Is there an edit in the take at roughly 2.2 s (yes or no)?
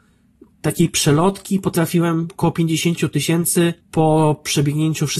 no